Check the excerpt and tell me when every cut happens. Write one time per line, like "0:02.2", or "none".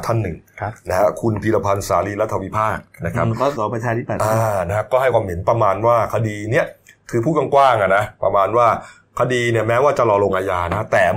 0:03.6